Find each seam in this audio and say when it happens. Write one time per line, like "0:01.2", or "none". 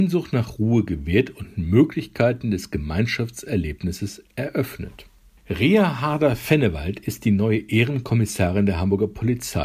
0:05.4